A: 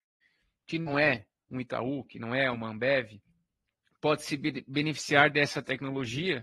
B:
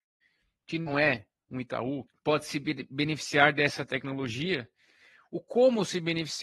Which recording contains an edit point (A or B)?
B